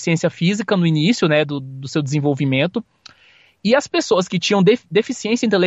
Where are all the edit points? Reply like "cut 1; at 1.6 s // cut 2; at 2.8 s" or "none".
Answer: none